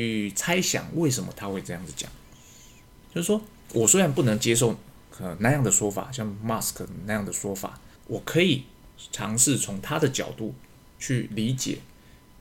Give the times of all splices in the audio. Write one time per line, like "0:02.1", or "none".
0:03.0
0:08.0